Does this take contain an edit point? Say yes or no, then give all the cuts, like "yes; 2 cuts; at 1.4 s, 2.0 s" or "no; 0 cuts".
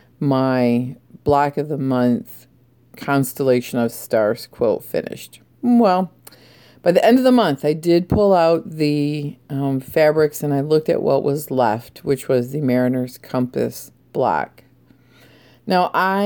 yes; 1 cut; at 14.0 s